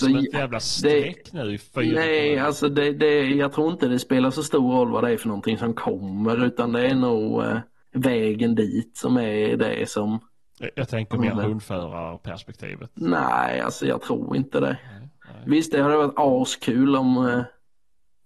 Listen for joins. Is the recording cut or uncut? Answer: uncut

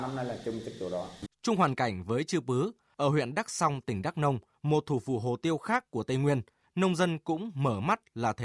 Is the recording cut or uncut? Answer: cut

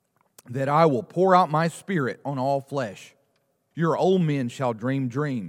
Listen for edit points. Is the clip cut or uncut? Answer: cut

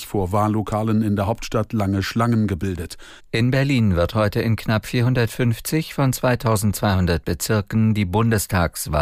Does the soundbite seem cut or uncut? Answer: cut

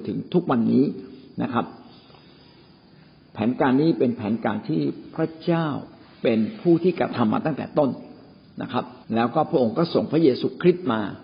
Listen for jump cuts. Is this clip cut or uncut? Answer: cut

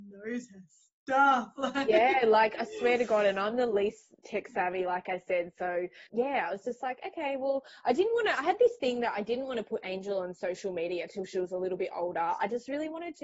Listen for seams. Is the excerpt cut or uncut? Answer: cut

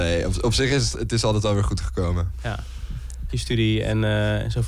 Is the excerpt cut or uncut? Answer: cut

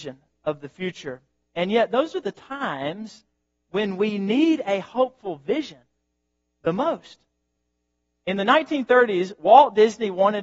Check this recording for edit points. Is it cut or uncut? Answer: uncut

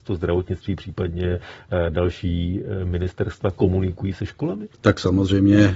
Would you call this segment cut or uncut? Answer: cut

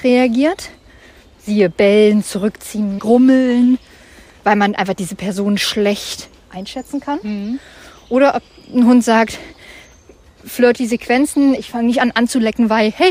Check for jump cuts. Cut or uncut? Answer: cut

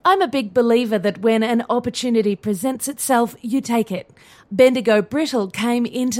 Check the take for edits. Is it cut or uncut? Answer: cut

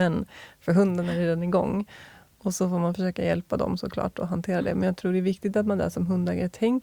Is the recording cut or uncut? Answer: uncut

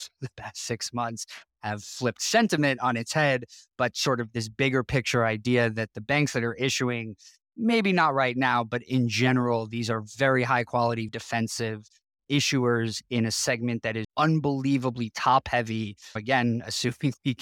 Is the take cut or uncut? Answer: cut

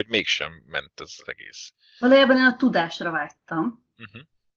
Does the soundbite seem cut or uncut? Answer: uncut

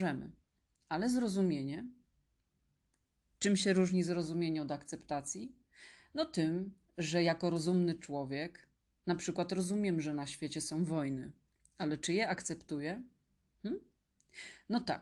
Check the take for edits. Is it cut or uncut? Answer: uncut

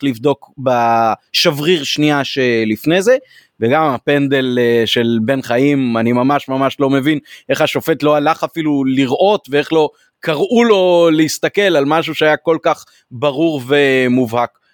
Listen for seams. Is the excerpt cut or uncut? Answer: uncut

